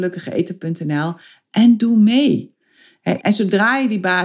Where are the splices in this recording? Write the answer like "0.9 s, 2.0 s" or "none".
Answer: 3.2 s